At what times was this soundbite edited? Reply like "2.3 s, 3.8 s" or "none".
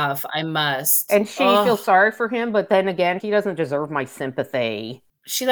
3.2 s

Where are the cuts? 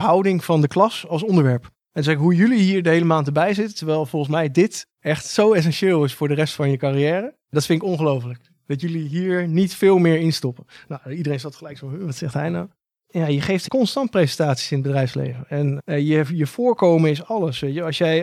none

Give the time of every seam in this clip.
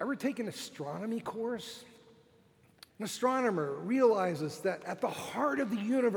2.9 s

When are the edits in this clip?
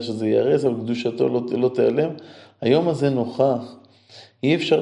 none

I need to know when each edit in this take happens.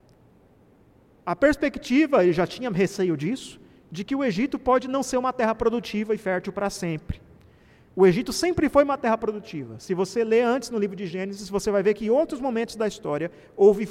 none

